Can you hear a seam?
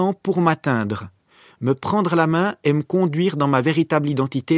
no; 0 cuts

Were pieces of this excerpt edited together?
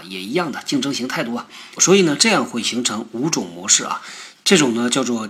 yes; 2 cuts; at 1.8 s, 4.3 s

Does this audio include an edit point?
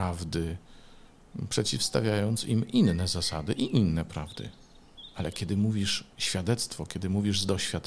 no; 0 cuts

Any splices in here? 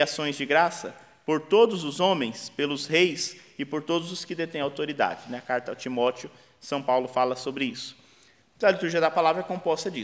no; 0 cuts

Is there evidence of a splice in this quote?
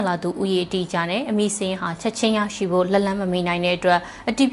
no; 0 cuts

